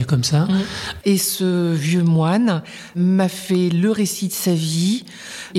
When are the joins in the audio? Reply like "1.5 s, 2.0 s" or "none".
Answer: 1.0 s